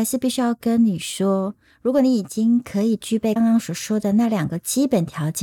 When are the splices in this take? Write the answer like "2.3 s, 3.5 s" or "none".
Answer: 3.4 s